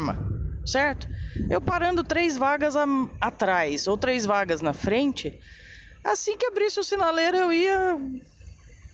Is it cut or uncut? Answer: uncut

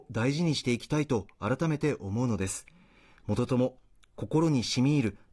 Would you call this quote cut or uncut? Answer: uncut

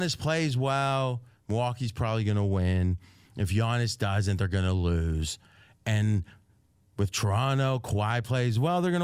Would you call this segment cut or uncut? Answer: uncut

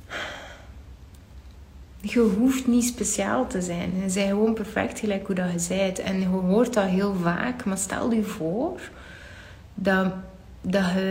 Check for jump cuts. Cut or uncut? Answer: uncut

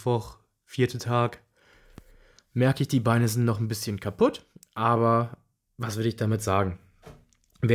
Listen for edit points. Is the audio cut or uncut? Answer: uncut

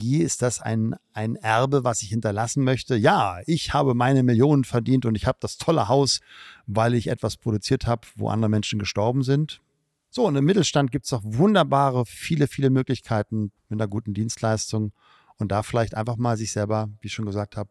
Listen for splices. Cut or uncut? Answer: cut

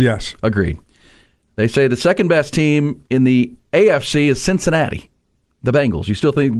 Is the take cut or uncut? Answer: uncut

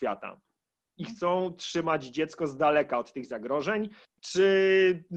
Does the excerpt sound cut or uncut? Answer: cut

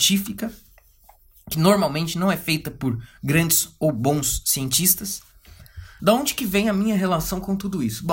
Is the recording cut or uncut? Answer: cut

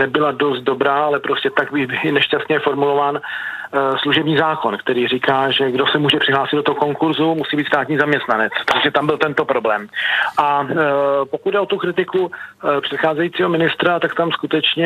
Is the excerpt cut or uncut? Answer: uncut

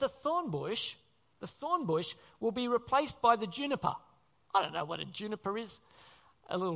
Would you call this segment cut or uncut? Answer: uncut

